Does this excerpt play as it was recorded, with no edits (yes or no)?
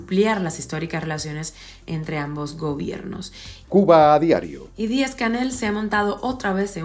no